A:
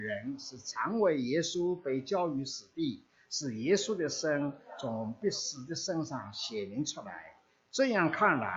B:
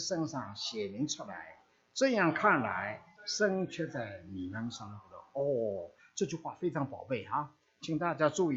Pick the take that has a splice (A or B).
B